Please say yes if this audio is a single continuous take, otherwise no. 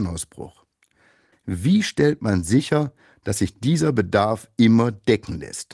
no